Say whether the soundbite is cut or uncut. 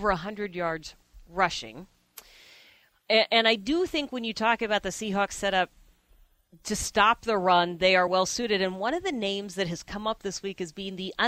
uncut